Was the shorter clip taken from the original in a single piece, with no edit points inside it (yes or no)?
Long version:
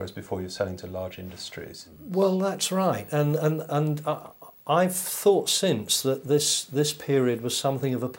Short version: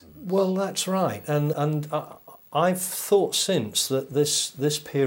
no